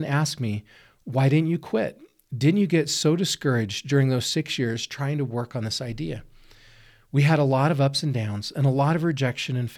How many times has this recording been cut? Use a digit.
0